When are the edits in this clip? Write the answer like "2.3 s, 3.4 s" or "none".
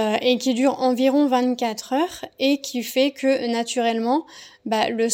none